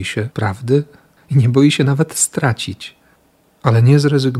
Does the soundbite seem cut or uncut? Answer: uncut